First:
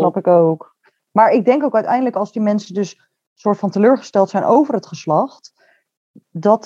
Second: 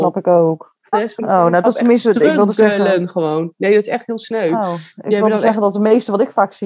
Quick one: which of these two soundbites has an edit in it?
second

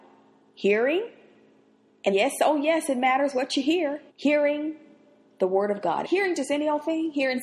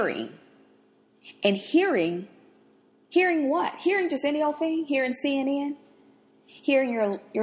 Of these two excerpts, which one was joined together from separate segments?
first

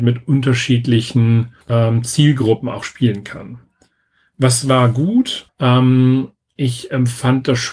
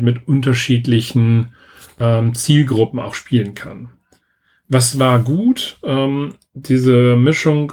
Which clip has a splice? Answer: first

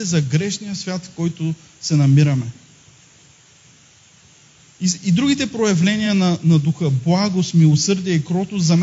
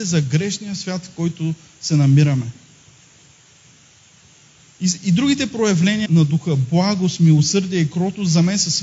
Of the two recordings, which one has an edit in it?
second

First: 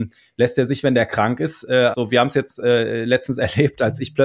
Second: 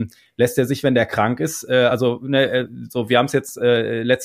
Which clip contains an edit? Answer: first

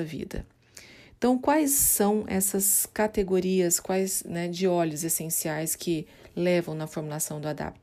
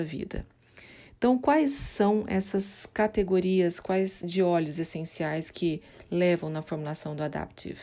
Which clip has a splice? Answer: second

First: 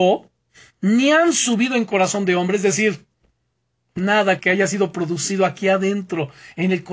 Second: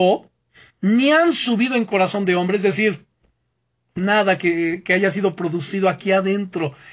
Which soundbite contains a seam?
first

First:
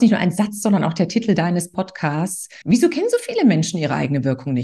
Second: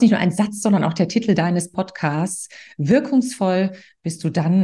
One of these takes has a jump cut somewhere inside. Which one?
first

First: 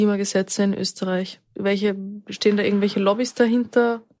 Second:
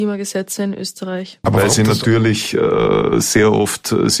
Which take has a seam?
second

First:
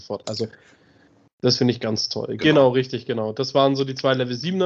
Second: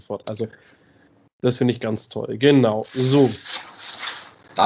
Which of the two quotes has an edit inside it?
first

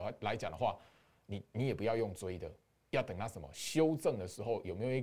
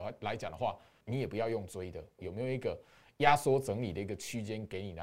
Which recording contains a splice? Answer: second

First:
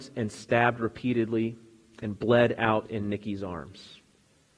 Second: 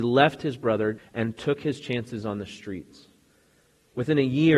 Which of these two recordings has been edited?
second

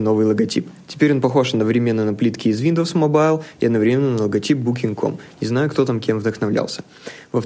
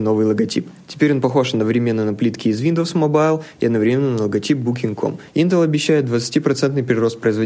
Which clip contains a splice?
second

